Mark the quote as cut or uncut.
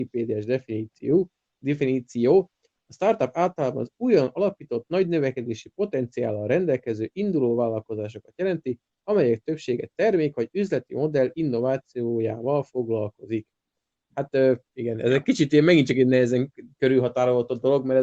uncut